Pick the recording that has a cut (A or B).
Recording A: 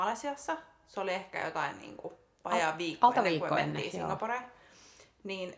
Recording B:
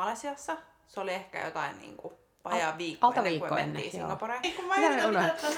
B